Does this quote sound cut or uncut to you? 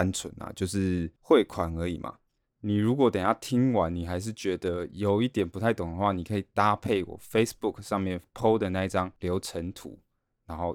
cut